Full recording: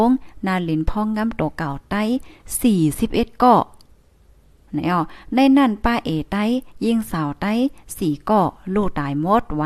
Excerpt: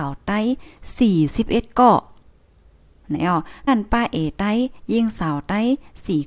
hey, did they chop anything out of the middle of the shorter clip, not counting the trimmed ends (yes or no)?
yes